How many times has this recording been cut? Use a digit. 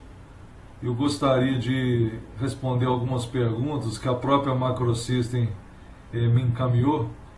0